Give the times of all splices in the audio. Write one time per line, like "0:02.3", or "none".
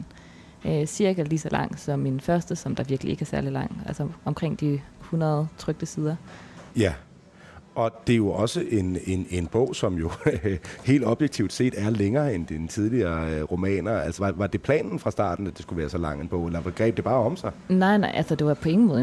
0:06.7
0:14.2